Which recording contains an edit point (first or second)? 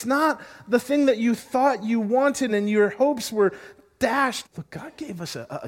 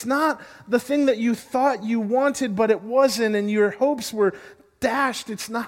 first